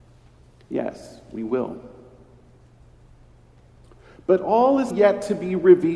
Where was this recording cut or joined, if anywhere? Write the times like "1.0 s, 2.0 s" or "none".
4.9 s